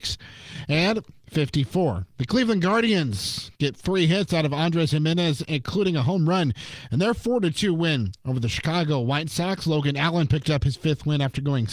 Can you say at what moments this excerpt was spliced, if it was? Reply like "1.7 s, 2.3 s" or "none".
none